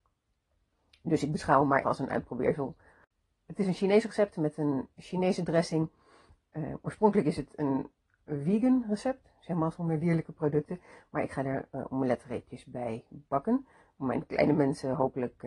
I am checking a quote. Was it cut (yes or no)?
yes